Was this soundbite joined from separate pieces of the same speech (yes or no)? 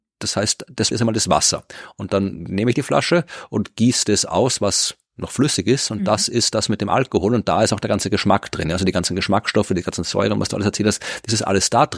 yes